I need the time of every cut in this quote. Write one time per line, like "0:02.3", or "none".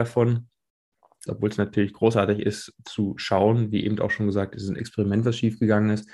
0:01.3